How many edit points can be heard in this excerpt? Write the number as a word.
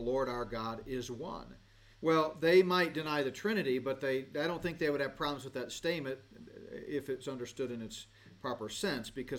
one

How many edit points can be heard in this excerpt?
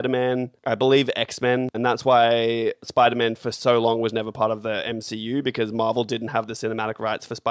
one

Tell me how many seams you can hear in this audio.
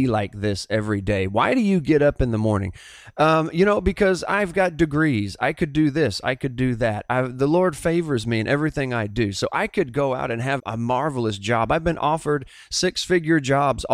one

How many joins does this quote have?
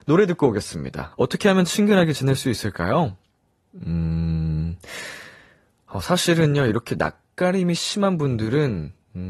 one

